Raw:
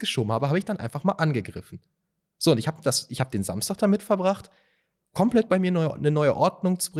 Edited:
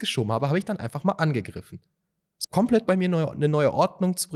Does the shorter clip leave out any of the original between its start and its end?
yes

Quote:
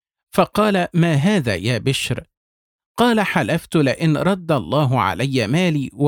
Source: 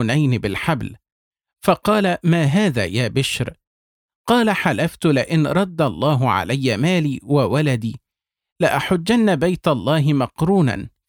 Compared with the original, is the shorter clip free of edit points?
yes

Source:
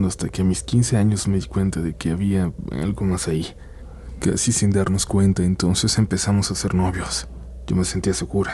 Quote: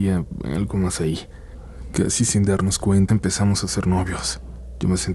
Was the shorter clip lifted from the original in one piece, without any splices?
no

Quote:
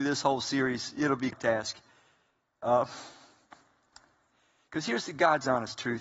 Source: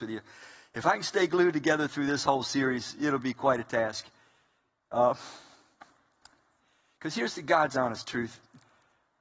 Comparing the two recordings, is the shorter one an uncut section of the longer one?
no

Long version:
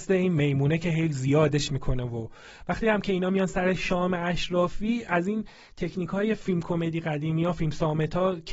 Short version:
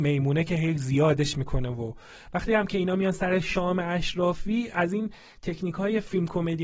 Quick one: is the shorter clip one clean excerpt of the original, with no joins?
yes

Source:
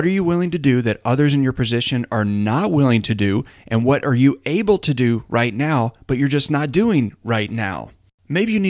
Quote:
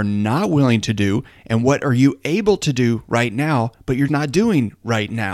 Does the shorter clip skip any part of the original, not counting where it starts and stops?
yes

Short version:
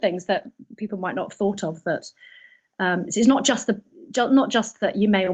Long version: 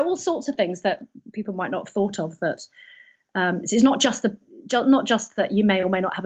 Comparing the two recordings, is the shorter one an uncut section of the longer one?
yes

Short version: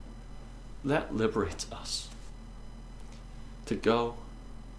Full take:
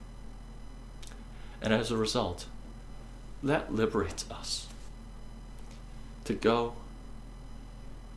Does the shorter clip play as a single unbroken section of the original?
yes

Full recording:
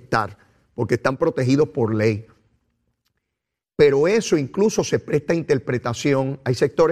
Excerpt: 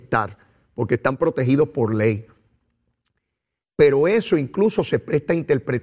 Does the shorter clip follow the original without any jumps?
yes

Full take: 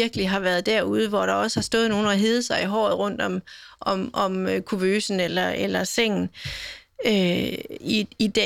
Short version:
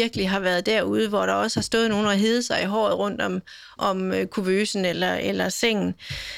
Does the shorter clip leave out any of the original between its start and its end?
yes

